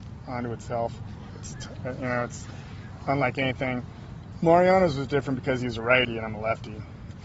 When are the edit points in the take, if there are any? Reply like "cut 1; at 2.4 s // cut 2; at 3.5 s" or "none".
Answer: none